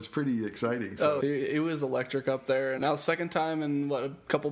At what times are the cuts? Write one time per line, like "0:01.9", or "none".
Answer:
0:01.2
0:02.8